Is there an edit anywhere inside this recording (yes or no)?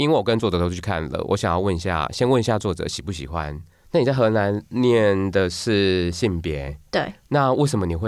yes